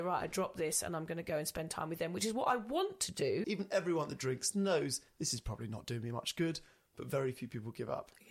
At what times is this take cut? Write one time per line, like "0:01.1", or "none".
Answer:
0:03.4